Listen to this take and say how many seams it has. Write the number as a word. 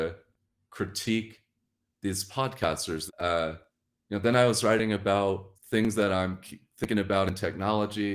two